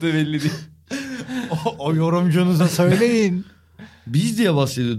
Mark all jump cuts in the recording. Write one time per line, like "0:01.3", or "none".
none